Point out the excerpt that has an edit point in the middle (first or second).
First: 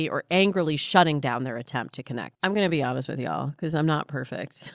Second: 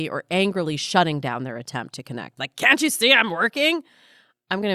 first